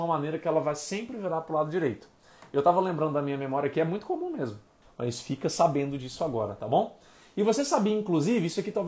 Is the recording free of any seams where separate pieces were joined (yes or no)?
no